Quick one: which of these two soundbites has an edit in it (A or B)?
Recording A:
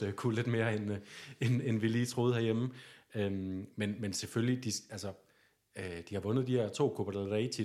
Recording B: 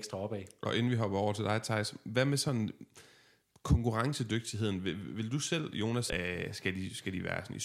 B